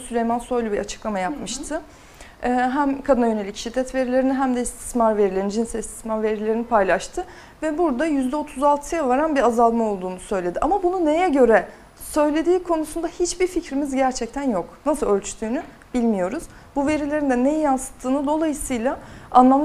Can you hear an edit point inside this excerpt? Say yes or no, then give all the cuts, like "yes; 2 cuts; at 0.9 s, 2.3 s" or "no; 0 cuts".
no; 0 cuts